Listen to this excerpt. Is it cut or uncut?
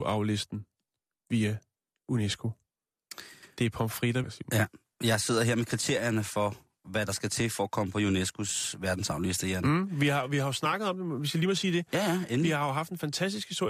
cut